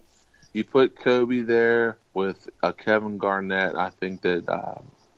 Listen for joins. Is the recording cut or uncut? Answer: cut